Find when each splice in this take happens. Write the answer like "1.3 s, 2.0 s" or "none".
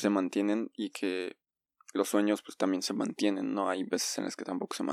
none